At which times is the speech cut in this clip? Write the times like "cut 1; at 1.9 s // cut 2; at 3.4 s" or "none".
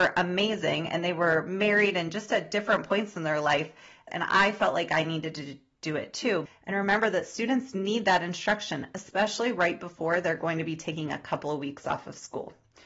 cut 1; at 4.1 s // cut 2; at 6.5 s